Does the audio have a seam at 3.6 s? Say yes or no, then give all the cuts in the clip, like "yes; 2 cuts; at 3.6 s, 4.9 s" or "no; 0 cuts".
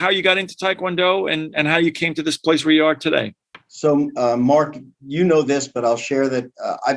no; 1 cut; at 1.5 s